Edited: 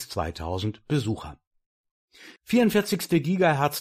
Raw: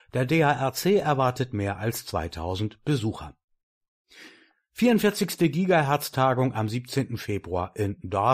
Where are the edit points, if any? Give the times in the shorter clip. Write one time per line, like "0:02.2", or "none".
0:02.4